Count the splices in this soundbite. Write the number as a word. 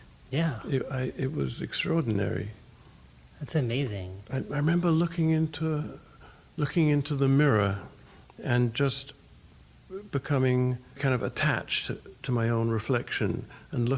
two